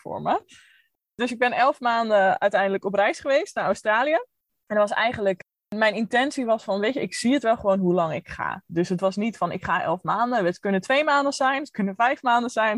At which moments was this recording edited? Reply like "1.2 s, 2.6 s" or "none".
none